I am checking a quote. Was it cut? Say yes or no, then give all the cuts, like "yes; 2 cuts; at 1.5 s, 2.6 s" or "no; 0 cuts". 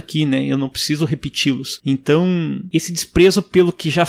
no; 0 cuts